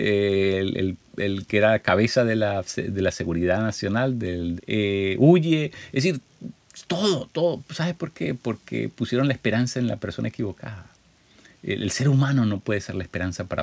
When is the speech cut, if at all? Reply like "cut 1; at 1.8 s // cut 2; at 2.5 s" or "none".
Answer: cut 1; at 4.6 s